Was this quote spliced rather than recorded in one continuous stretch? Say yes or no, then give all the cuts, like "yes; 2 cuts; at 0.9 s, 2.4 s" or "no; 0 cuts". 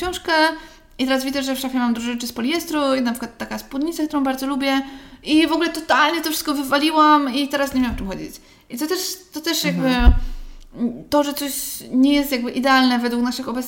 no; 0 cuts